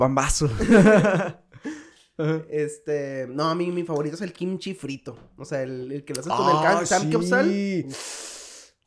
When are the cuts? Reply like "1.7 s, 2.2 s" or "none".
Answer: none